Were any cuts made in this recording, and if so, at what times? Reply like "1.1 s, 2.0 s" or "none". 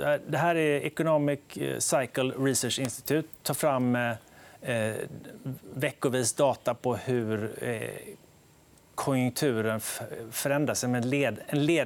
none